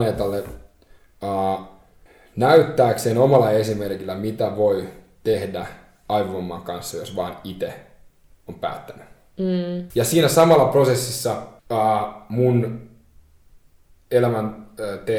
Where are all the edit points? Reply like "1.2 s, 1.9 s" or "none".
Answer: 9.9 s, 11.6 s